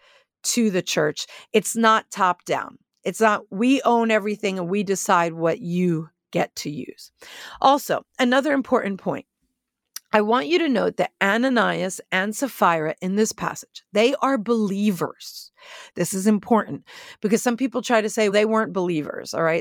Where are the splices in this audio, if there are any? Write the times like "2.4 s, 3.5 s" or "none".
15.9 s, 18.3 s